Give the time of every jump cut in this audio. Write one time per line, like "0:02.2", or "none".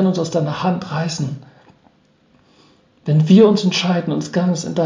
none